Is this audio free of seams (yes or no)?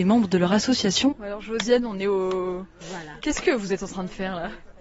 no